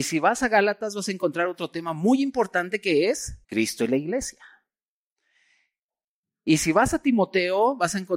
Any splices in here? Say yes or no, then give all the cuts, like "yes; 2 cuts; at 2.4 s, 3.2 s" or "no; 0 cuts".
yes; 1 cut; at 3.4 s